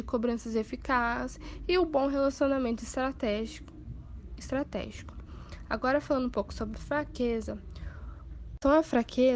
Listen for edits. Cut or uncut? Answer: uncut